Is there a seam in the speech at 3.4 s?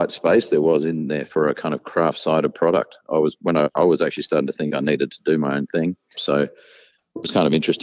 yes; 2 cuts; at 3.4 s, 6.1 s

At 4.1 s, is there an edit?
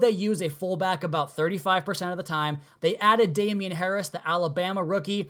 no; 1 cut; at 2.7 s

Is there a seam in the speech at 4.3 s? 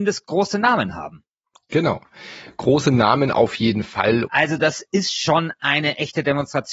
yes; 1 cut; at 4.3 s

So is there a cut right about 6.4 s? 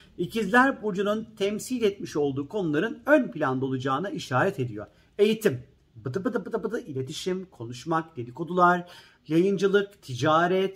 yes; 1 cut; at 6.4 s

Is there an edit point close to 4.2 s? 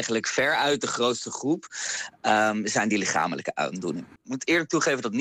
yes; 1 cut; at 4.2 s

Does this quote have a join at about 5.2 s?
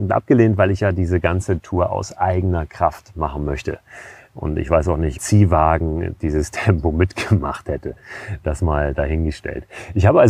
yes; 1 cut; at 5.2 s

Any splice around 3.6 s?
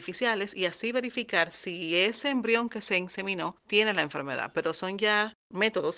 yes; 1 cut; at 3.6 s

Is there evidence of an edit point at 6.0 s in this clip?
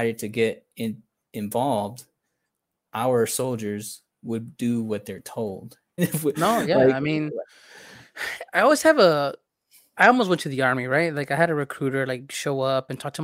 yes; 1 cut; at 6.0 s

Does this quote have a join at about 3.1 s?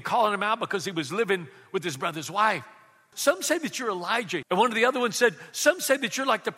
yes; 2 cuts; at 3.1 s, 4.4 s

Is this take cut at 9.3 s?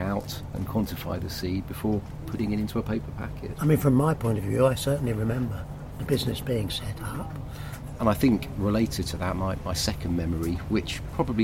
no; 2 cuts; at 3.6 s, 8.0 s

